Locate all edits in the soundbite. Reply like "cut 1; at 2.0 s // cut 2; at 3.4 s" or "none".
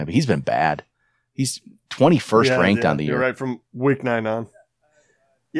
none